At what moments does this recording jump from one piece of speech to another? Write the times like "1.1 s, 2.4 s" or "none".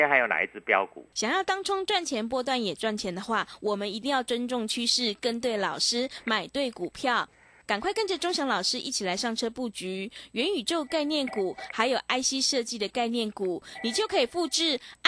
1.1 s